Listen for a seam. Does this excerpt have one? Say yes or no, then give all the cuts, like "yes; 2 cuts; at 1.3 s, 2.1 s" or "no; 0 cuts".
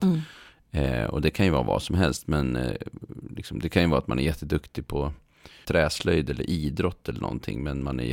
yes; 1 cut; at 5.6 s